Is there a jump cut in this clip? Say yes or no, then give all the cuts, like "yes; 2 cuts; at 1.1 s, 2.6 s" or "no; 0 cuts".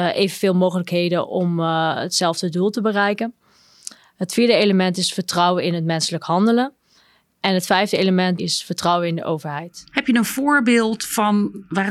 yes; 1 cut; at 8.4 s